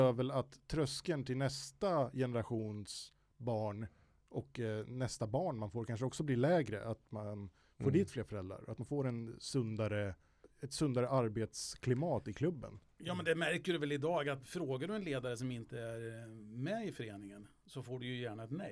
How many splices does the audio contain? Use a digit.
1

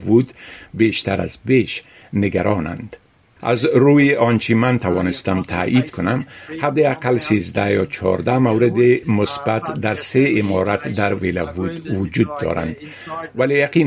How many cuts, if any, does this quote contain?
1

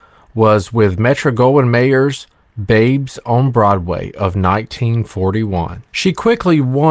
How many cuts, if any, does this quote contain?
1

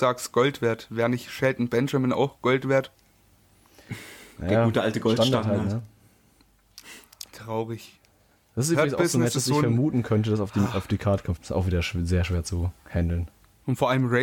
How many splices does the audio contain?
2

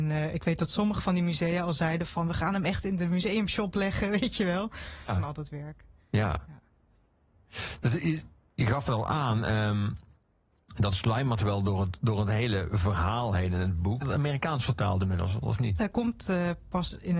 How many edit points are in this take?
3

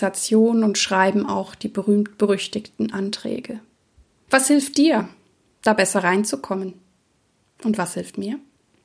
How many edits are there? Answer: 0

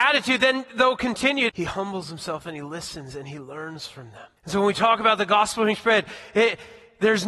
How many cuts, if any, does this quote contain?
2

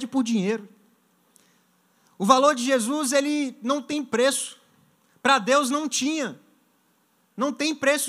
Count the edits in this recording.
0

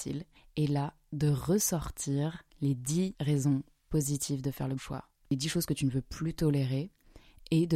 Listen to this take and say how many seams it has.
1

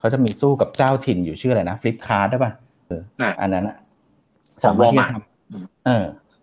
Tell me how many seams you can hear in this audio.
1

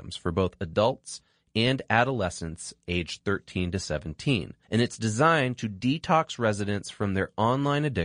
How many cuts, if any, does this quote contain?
1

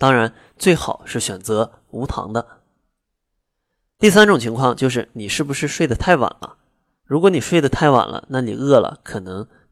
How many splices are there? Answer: 0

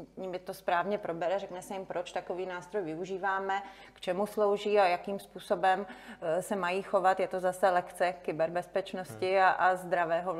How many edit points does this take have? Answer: 0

